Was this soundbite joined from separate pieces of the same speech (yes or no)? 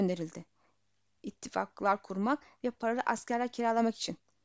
no